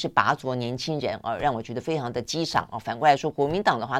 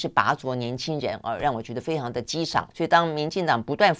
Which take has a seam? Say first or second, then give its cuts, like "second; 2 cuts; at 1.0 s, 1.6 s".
second; 1 cut; at 2.7 s